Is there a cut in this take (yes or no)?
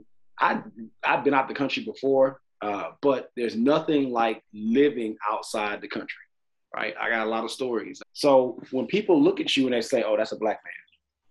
yes